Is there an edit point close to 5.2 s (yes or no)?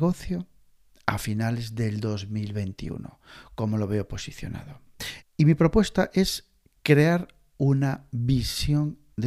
yes